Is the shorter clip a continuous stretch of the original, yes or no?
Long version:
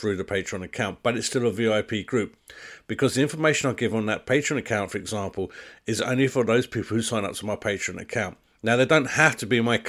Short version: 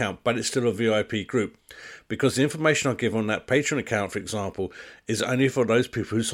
yes